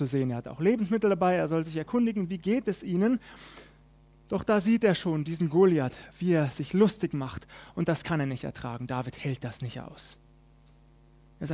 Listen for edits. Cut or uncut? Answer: uncut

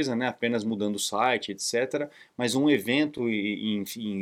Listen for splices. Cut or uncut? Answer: uncut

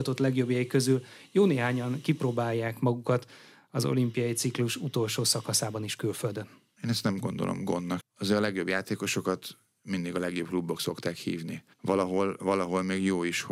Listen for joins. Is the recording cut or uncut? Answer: cut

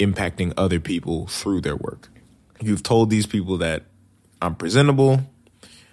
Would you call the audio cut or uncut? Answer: cut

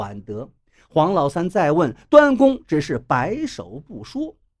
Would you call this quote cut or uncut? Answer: uncut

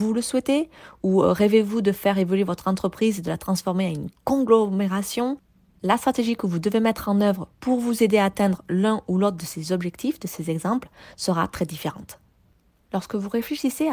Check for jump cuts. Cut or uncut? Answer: uncut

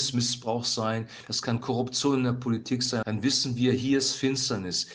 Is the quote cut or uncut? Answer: cut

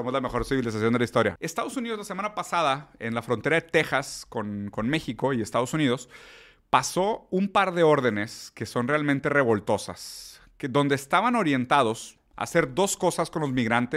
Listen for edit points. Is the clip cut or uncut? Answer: cut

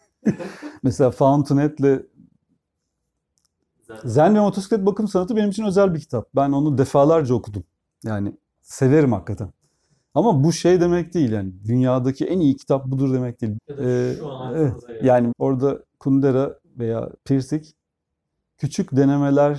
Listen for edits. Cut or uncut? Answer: cut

